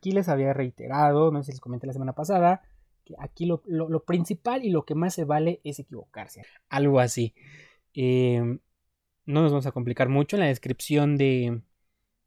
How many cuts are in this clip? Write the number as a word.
two